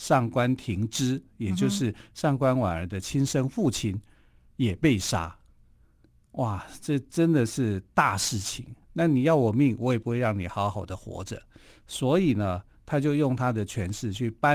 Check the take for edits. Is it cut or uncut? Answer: cut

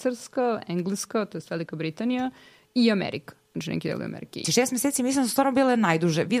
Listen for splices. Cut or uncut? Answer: cut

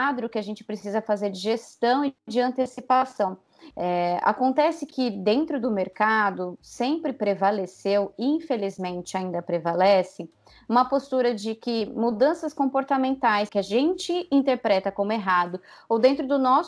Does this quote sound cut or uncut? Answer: cut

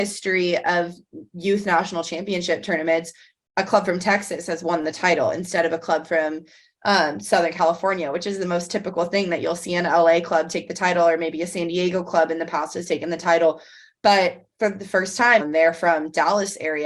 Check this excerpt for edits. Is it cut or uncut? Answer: cut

